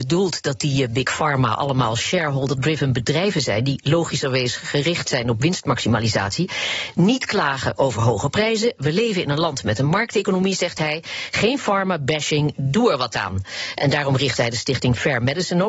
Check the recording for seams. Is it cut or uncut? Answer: uncut